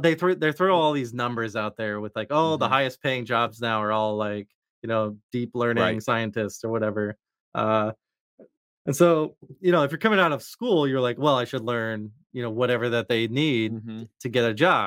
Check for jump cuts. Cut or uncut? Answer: uncut